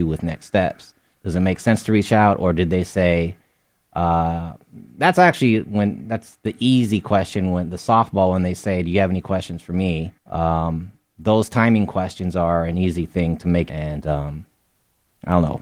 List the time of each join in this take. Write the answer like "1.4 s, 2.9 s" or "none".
10.2 s, 13.7 s